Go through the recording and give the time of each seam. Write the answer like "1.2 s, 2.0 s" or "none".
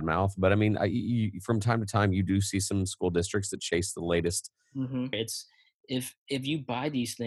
5.1 s